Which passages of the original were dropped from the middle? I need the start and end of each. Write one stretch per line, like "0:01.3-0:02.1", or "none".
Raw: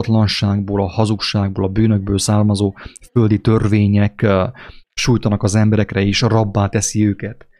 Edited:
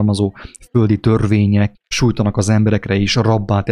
0:04.2-0:04.8